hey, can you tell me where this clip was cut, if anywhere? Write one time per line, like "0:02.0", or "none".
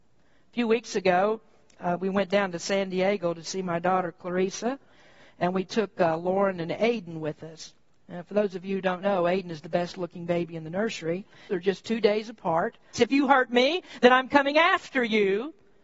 0:11.5
0:12.9